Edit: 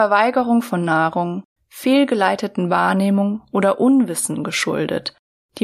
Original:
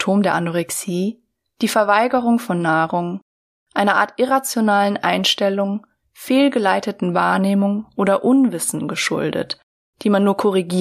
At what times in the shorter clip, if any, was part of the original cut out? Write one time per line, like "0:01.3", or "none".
0:01.6